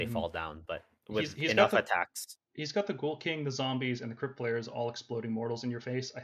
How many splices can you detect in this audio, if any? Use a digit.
0